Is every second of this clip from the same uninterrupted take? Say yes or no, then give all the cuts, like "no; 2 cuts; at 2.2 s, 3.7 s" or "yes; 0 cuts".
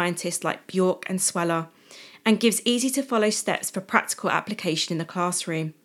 yes; 0 cuts